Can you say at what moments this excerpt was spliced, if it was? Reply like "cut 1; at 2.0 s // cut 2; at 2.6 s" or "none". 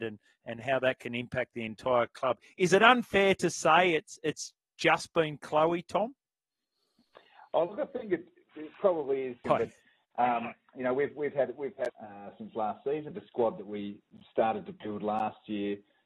cut 1; at 9.4 s // cut 2; at 11.9 s // cut 3; at 13.1 s

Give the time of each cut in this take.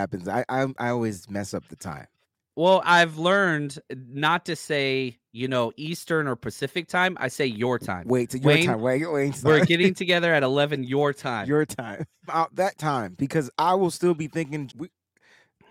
cut 1; at 12.3 s // cut 2; at 14.7 s

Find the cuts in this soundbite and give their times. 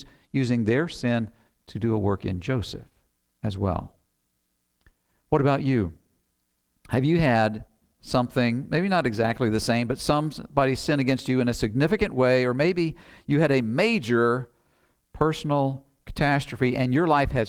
none

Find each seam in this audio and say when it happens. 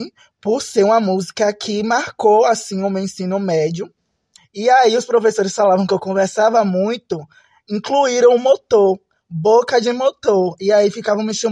cut 1; at 4.4 s

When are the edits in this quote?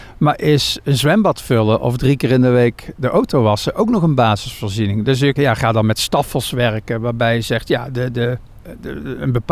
cut 1; at 5.4 s

